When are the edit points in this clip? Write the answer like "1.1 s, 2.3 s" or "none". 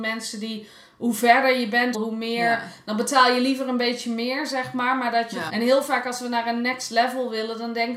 1.9 s, 5.5 s